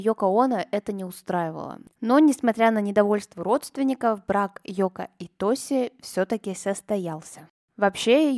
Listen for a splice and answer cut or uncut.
uncut